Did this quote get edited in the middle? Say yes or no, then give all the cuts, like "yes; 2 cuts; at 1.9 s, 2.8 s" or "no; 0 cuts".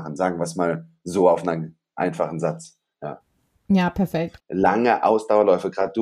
yes; 1 cut; at 4.4 s